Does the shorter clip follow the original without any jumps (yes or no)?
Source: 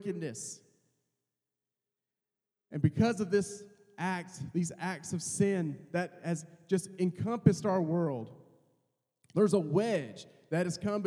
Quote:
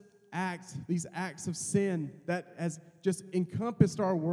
yes